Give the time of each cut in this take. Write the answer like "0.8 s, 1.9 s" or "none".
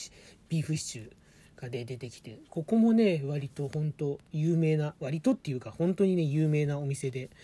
none